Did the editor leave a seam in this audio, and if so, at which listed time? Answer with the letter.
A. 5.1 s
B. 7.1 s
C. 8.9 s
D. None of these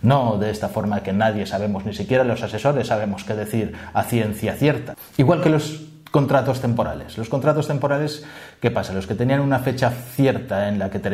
D